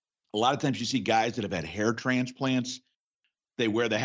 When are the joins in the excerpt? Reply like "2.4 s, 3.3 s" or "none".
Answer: none